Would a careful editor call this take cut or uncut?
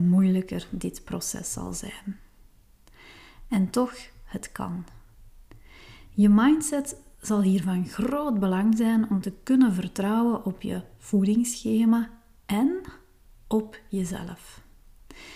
uncut